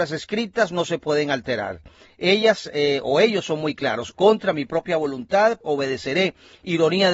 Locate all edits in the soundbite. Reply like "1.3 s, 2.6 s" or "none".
4.1 s, 5.6 s